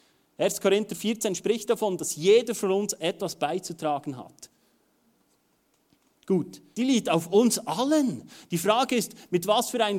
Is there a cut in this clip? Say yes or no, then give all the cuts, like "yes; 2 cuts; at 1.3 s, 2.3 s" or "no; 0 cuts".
yes; 1 cut; at 6.7 s